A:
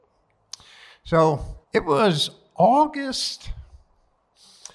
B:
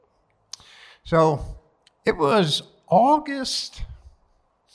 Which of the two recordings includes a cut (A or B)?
A